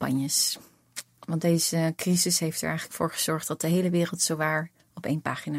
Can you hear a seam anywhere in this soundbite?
no; 0 cuts

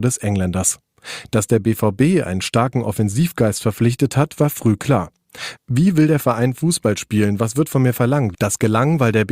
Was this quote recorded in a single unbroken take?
no; 2 cuts; at 5.6 s, 8.3 s

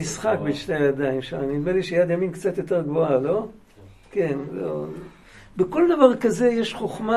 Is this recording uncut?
yes; 0 cuts

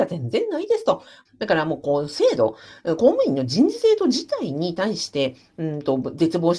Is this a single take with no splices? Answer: no; 1 cut; at 1.3 s

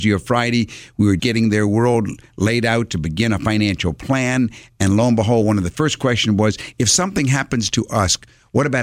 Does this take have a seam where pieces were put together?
yes; 1 cut; at 1.2 s

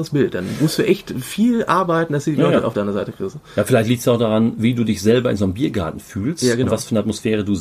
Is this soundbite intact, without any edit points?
yes; 0 cuts

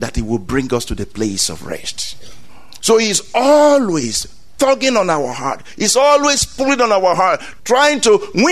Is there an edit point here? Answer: yes; 1 cut; at 7.6 s

